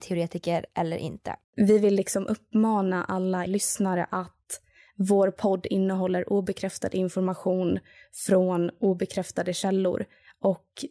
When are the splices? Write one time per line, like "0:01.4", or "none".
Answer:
0:01.4
0:03.5